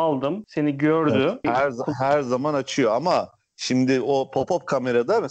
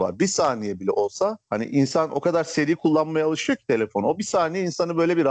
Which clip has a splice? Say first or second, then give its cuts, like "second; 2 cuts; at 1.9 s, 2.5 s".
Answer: first; 1 cut; at 1.4 s